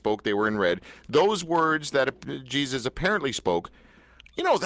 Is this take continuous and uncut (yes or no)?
yes